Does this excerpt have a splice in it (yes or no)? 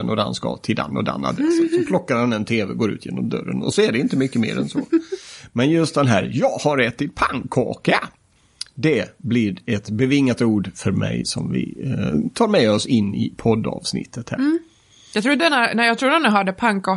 no